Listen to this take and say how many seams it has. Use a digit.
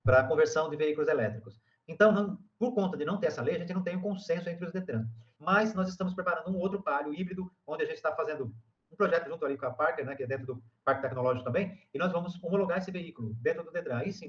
1